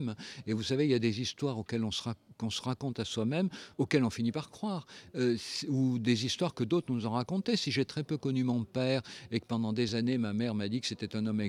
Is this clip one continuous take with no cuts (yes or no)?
no